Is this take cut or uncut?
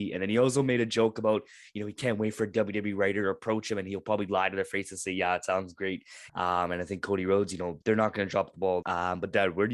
cut